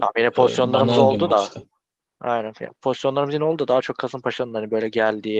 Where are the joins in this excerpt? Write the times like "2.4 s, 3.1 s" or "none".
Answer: none